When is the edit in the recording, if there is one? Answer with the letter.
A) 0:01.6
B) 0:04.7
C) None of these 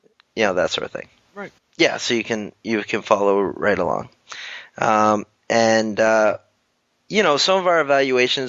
A